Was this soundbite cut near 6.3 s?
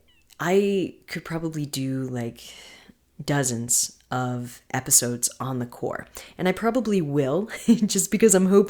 no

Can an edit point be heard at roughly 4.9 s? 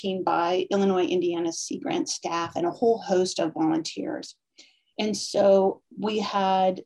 yes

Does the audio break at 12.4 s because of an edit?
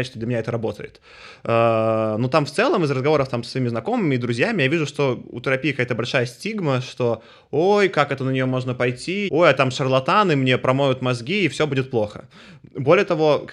no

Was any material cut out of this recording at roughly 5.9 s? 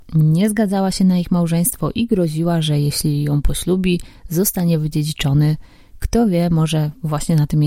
no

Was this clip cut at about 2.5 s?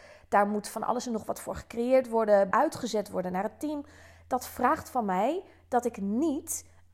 yes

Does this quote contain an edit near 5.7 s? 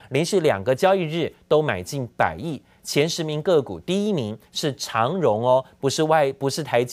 no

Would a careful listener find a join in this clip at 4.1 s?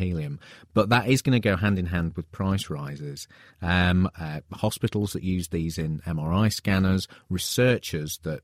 yes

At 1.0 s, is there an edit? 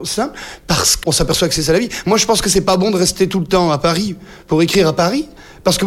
yes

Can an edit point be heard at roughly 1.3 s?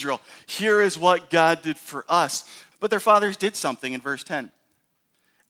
no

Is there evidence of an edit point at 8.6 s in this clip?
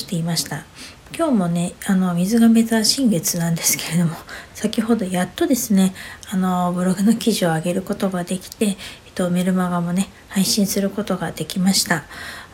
no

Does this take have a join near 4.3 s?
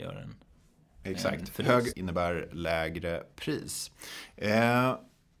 no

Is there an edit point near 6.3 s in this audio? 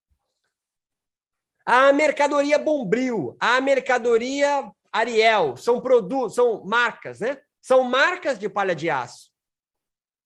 no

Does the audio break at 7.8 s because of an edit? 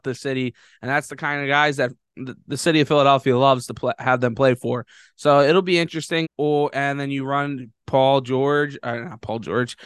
yes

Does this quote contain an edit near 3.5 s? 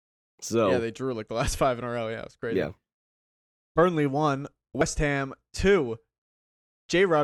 no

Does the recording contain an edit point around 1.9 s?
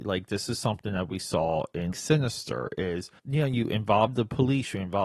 yes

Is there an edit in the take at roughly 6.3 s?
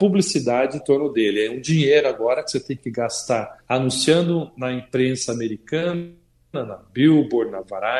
no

